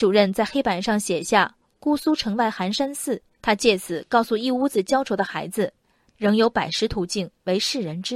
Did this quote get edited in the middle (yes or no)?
yes